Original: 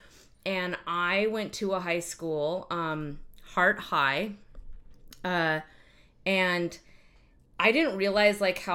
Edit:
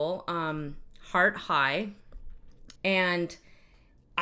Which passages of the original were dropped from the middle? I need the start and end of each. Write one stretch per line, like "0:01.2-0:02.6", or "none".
0:05.2-0:06.2